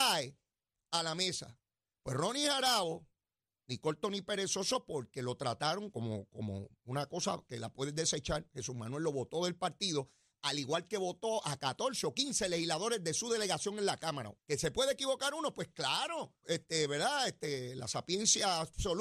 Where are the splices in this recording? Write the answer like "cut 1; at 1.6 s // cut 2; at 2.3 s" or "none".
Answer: cut 1; at 5.9 s // cut 2; at 14.4 s // cut 3; at 16.4 s

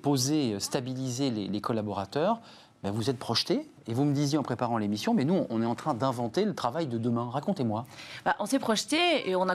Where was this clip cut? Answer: none

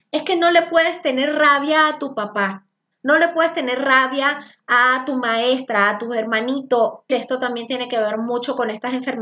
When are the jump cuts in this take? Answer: cut 1; at 2.9 s // cut 2; at 7.1 s

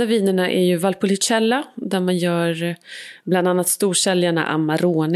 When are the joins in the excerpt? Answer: none

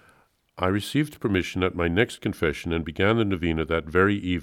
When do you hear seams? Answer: none

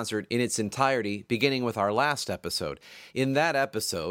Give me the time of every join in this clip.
none

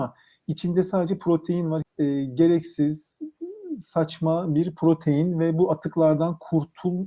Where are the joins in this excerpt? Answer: cut 1; at 1.8 s

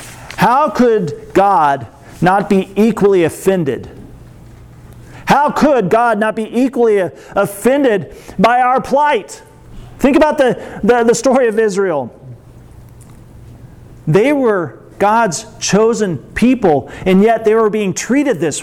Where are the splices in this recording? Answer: none

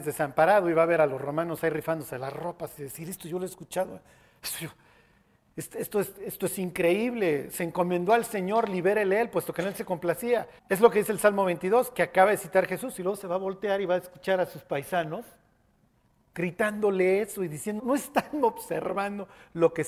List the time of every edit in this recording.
cut 1; at 10.6 s // cut 2; at 17.8 s

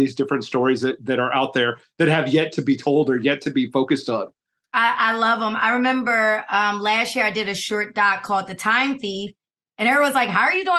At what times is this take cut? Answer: none

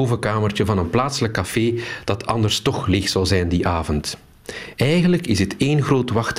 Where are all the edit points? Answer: none

